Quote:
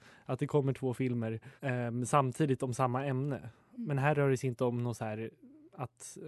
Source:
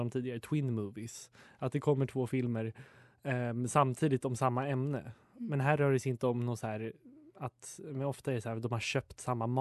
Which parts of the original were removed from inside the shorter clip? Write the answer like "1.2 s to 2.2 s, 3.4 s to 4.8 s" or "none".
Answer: 2.9 s to 3.2 s